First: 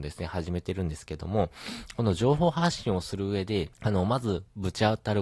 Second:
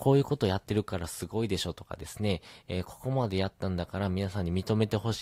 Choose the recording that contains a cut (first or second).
first